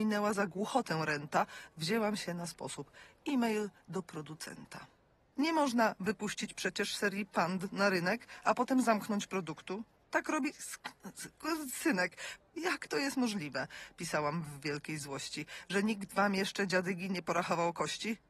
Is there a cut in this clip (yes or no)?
yes